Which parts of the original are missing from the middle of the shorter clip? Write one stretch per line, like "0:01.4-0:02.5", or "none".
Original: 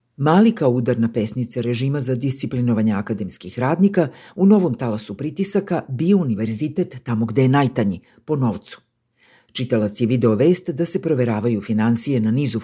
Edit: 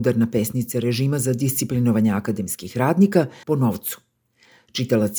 0:04.2-0:08.2